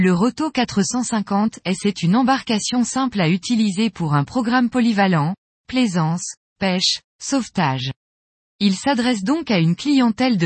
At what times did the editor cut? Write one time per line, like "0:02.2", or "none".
0:07.1

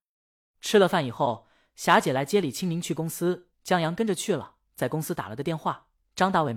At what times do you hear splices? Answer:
none

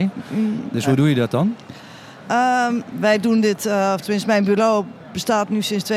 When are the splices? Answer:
0:02.9

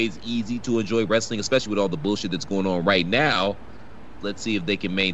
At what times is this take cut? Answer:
0:04.2

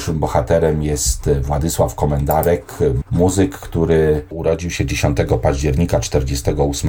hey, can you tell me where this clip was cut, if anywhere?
0:03.0

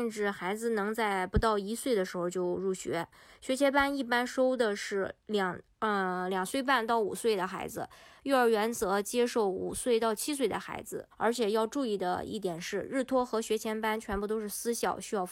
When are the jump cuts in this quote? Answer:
0:11.1

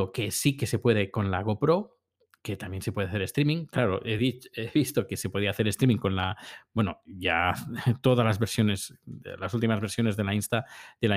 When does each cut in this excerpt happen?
none

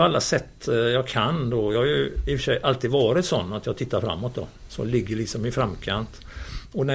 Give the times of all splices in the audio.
none

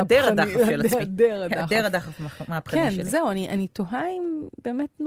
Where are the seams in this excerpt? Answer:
none

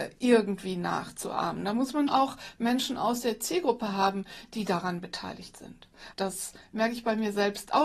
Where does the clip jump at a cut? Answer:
0:02.1
0:06.1

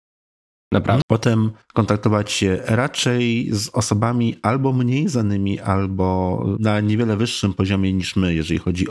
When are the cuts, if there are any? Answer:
0:01.0

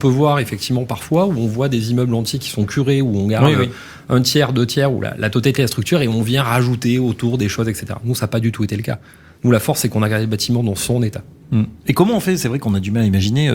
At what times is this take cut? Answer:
none

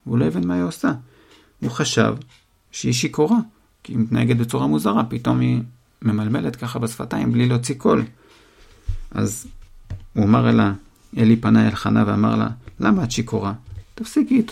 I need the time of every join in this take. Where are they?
none

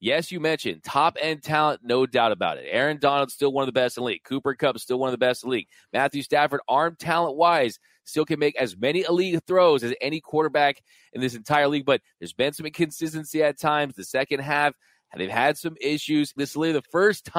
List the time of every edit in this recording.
0:16.4

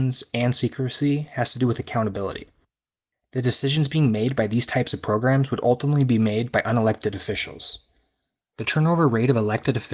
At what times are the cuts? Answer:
0:08.5

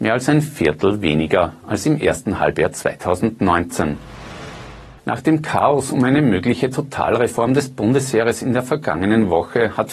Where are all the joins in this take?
0:05.0

